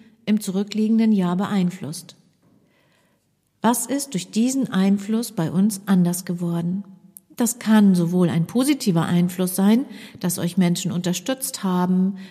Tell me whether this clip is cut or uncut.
uncut